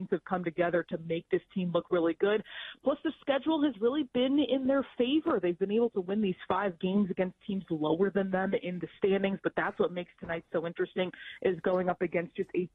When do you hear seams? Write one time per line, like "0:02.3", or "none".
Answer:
none

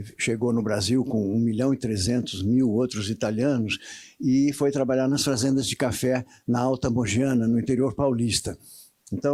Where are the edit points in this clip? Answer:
none

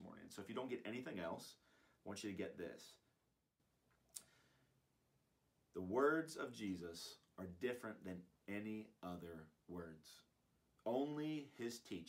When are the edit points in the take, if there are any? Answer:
none

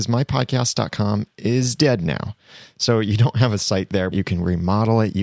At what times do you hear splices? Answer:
0:04.1

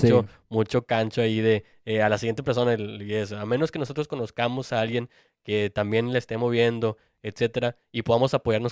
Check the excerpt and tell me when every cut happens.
none

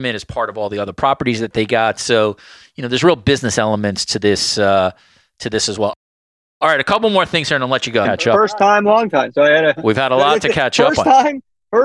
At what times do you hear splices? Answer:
0:08.0

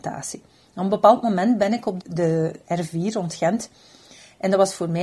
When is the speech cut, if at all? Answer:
0:02.0

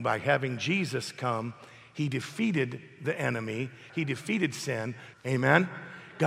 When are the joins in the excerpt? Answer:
0:03.9
0:05.1

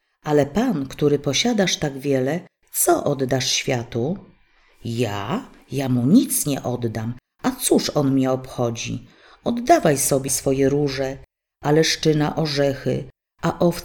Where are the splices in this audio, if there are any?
0:10.3

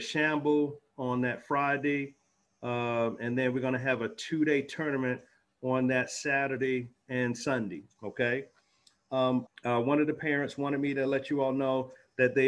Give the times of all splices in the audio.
0:09.5

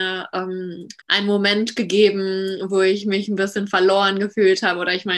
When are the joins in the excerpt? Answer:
0:01.0

